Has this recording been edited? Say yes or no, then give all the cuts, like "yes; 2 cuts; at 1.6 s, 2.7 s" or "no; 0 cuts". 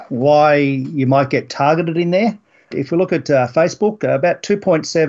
yes; 1 cut; at 2.7 s